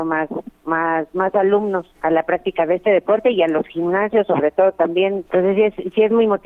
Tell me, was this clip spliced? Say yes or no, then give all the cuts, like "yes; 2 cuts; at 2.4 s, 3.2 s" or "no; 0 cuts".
yes; 2 cuts; at 1.9 s, 5.3 s